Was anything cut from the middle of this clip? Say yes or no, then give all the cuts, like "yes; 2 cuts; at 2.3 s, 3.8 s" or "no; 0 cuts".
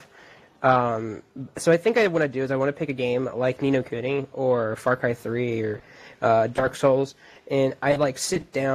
no; 0 cuts